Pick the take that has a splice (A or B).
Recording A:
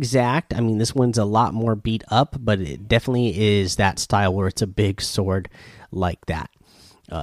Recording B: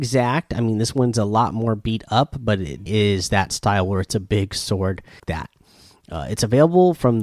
B